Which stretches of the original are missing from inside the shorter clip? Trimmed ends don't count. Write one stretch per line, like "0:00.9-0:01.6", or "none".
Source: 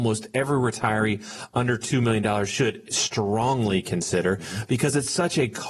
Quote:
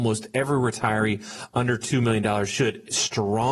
none